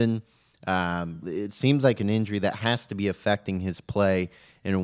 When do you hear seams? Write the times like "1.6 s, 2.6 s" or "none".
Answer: 1.2 s